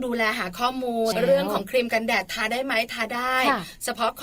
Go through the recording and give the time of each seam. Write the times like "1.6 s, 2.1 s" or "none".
1.1 s